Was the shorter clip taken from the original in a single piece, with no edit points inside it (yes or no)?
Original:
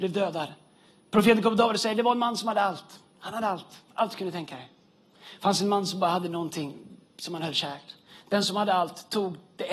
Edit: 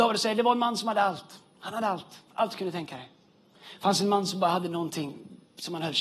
yes